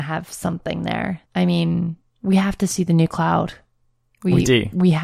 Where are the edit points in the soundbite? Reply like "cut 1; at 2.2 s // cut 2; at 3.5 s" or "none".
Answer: cut 1; at 1.3 s